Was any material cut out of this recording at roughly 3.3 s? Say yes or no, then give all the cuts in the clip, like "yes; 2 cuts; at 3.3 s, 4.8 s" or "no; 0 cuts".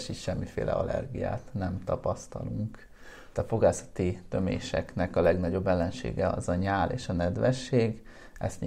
yes; 1 cut; at 3.3 s